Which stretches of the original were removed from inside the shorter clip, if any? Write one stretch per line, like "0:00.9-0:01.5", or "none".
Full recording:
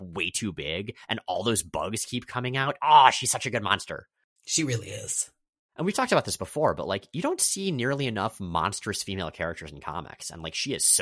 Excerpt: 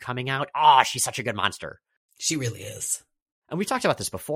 none